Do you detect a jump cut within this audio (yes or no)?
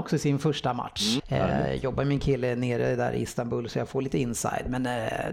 yes